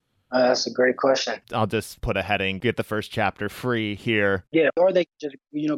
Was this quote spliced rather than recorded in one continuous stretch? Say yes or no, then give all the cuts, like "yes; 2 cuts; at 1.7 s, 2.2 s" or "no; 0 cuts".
yes; 2 cuts; at 1.4 s, 4.5 s